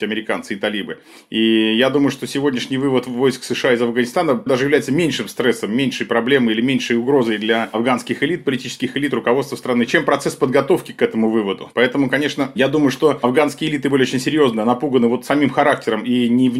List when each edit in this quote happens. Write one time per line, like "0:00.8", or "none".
0:04.5
0:11.7

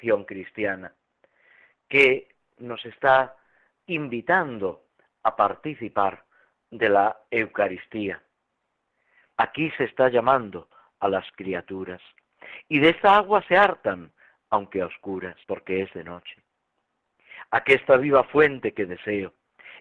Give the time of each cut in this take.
0:09.3
0:15.4

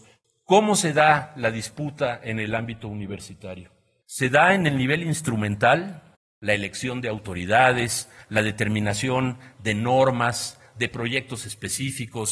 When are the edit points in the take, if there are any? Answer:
none

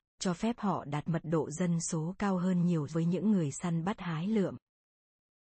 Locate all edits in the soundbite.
0:02.9

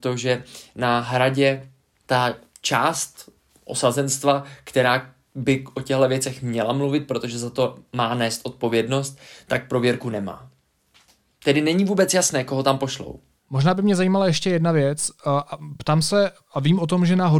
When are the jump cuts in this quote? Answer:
none

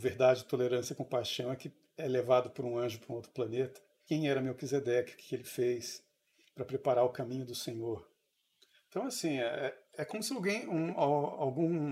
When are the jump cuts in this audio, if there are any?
0:04.1

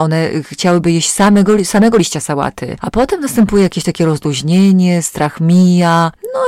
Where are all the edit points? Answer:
none

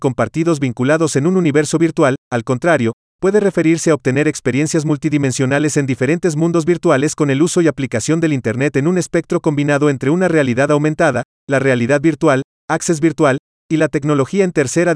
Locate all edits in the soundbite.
0:02.2

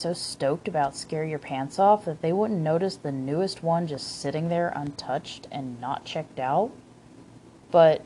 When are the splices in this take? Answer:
none

